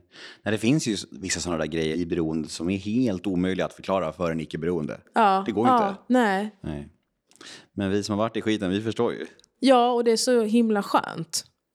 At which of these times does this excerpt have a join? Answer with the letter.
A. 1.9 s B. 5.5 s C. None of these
A